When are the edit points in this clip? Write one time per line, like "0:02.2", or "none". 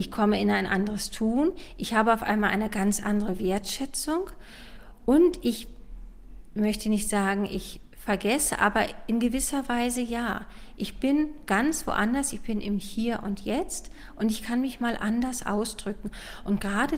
none